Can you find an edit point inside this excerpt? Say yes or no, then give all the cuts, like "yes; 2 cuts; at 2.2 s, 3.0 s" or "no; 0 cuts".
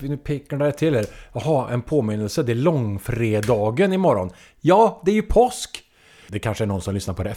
yes; 1 cut; at 6.3 s